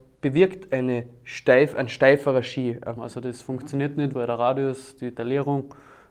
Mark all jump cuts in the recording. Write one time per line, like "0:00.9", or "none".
0:03.0
0:04.1